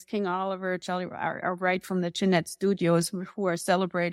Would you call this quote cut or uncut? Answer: uncut